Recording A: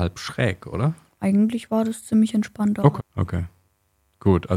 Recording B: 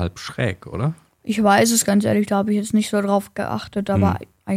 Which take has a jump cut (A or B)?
A